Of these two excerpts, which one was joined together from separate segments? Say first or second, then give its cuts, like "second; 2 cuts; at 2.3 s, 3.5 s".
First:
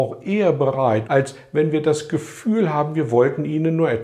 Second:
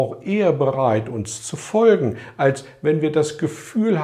first; 1 cut; at 1.0 s